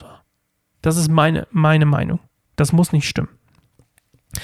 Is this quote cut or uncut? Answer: uncut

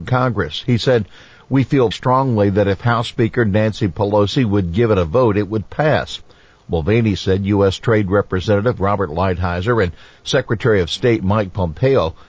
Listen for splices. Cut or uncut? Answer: cut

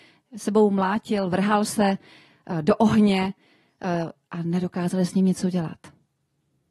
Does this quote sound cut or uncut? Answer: uncut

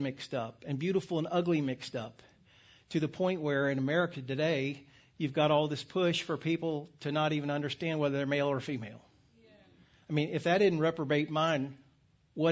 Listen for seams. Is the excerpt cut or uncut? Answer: uncut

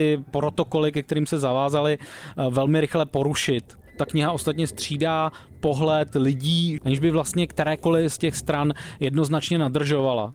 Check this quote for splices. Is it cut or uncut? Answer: cut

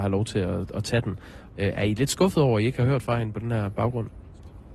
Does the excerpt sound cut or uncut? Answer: cut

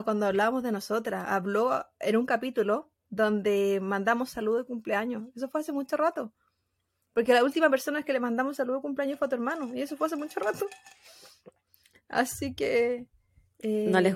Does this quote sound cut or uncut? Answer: uncut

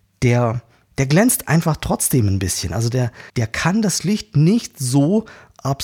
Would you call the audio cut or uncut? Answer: cut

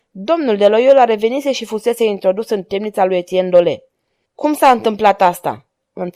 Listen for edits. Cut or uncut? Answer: cut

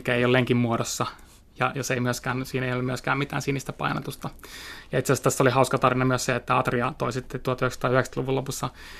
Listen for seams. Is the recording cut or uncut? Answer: uncut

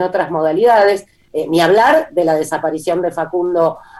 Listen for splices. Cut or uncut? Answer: cut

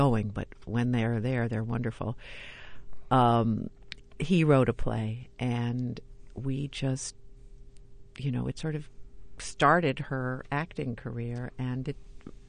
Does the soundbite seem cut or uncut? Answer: uncut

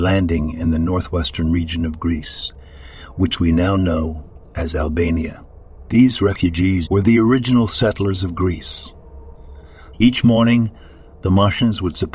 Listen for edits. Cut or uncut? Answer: cut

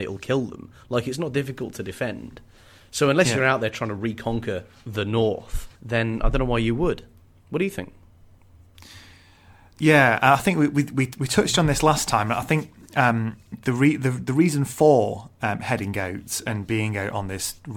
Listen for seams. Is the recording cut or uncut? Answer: cut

